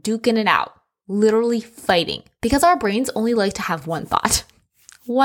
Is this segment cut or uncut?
uncut